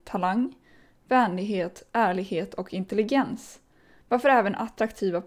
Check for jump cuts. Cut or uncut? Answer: uncut